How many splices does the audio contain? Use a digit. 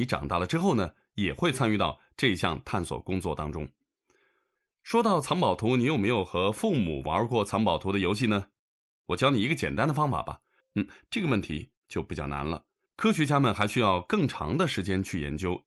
2